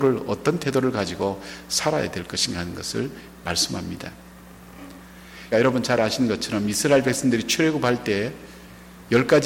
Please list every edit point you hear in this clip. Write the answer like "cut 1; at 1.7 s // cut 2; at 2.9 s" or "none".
cut 1; at 5.5 s